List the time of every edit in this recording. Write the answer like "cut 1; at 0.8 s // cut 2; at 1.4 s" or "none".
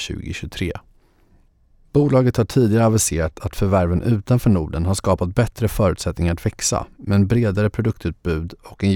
cut 1; at 1.8 s